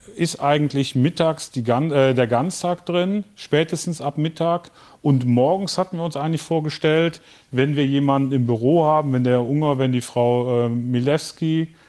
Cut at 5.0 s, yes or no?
no